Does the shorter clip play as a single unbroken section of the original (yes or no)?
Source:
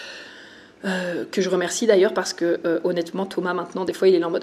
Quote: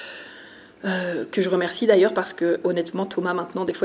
no